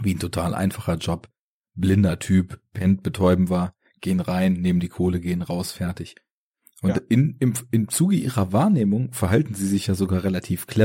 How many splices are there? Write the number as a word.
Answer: zero